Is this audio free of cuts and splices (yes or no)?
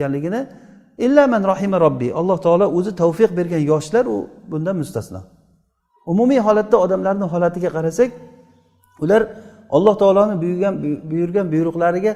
yes